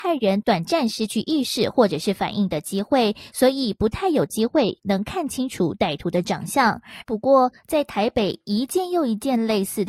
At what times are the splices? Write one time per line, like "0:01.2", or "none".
0:07.0